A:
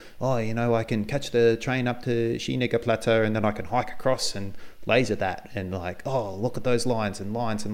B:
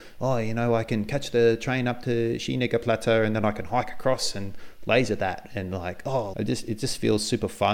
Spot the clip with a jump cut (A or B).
B